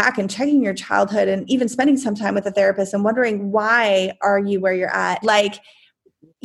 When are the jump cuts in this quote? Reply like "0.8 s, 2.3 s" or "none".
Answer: 5.2 s